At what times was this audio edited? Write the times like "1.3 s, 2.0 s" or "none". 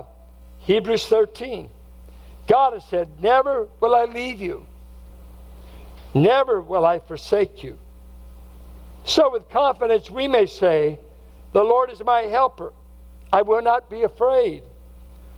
none